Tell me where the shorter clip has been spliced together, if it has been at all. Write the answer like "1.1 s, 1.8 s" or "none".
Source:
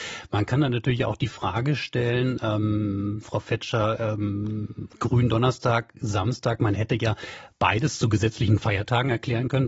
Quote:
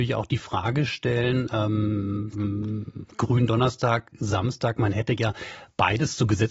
2.3 s